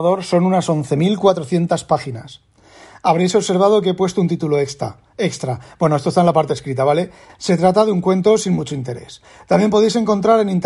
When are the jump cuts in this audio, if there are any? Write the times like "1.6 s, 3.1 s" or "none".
7.3 s